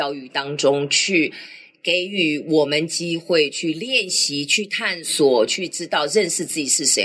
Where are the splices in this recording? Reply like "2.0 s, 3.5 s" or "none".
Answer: none